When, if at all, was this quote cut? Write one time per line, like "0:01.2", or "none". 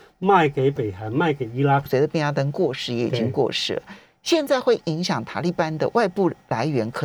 0:01.9